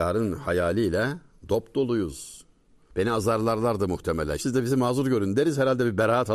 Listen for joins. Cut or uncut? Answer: cut